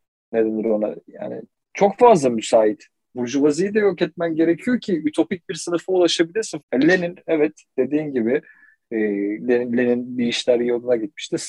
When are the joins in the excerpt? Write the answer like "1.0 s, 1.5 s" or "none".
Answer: 3.1 s, 6.6 s